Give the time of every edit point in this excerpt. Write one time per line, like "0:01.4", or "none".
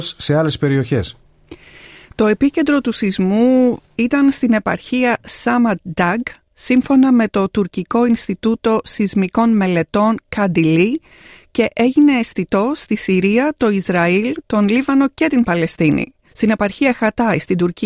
0:14.4
0:16.3